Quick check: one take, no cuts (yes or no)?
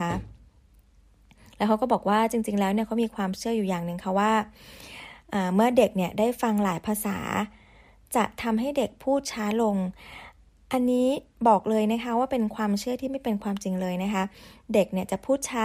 yes